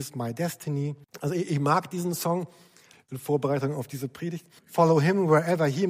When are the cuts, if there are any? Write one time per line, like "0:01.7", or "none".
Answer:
0:01.0
0:02.9
0:04.6